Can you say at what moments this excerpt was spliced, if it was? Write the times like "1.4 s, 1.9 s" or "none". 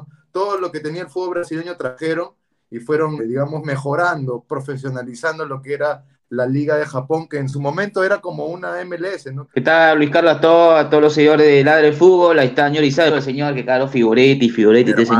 3.2 s, 9.5 s, 13.1 s